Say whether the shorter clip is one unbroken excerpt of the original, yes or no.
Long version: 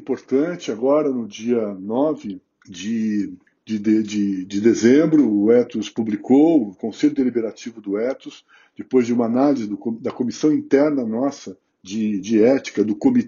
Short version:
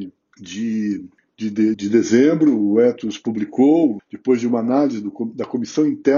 no